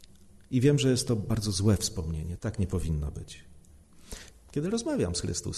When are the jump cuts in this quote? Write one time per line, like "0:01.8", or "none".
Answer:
0:02.4
0:04.3